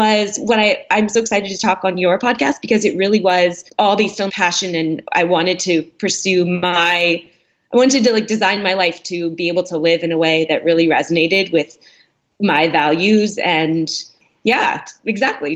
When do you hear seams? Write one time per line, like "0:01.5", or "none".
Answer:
0:04.3